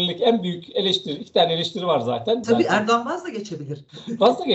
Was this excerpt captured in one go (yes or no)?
no